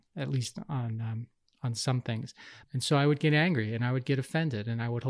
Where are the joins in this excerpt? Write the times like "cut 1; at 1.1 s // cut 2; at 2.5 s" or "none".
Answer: cut 1; at 2.6 s